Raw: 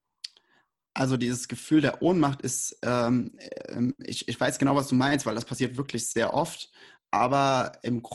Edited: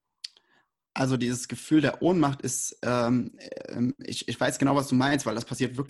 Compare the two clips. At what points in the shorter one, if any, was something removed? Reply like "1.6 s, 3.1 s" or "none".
none

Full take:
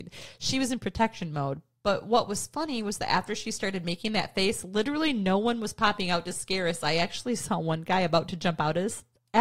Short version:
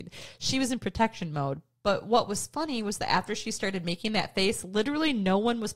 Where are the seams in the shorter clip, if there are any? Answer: none

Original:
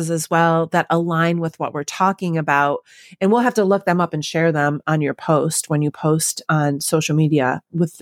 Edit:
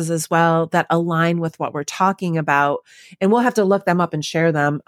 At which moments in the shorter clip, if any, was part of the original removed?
none

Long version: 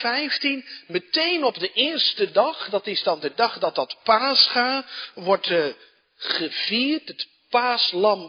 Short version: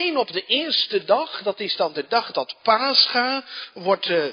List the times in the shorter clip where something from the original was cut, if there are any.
2.3 s

